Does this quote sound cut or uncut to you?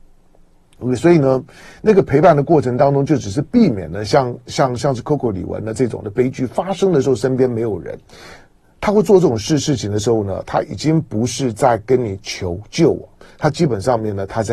uncut